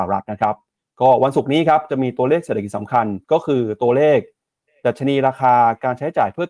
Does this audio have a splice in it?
yes; 1 cut; at 3.2 s

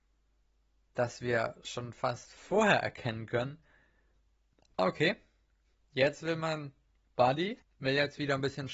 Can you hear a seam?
yes; 2 cuts; at 4.8 s, 7.6 s

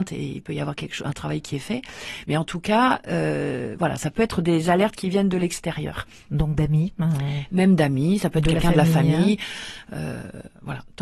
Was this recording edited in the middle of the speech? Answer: no; 0 cuts

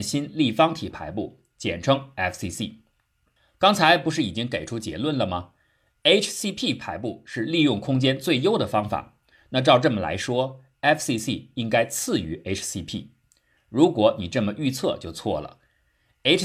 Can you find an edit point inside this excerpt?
no; 0 cuts

